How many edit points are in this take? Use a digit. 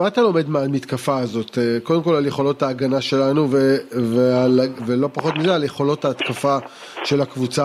1